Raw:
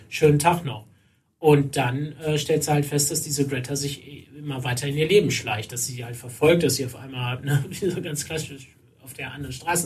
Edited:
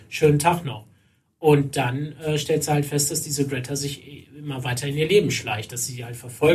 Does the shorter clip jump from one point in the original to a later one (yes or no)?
no